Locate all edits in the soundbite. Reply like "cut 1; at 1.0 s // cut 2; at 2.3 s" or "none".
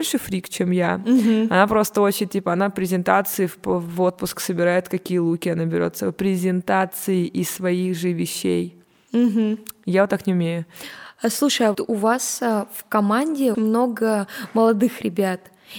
cut 1; at 11.7 s // cut 2; at 13.5 s